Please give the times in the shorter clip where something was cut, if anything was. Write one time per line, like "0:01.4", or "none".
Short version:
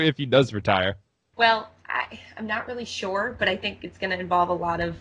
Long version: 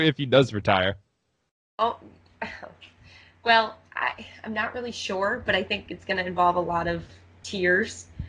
0:01.3